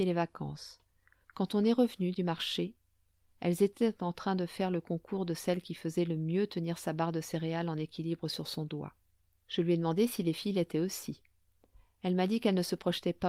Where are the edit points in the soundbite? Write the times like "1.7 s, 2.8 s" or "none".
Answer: 1.2 s, 9.4 s